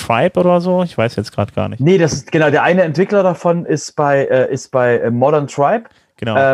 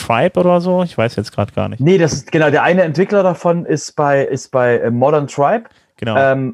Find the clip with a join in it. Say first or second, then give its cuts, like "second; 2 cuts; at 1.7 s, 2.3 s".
second; 1 cut; at 4.3 s